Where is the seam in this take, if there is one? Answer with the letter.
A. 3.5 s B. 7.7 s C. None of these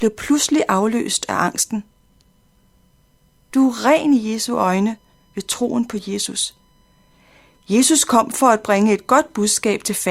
A